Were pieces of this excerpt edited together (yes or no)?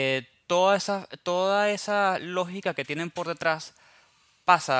no